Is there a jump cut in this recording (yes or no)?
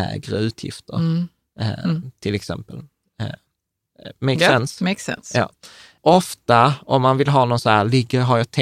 no